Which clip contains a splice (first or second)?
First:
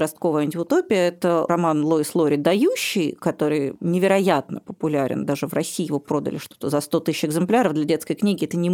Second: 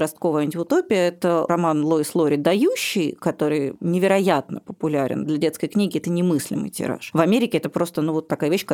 second